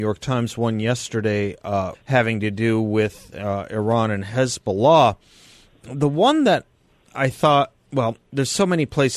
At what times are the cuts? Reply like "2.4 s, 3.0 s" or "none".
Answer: 1.9 s